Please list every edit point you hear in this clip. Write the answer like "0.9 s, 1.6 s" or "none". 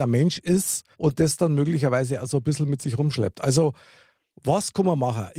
0.9 s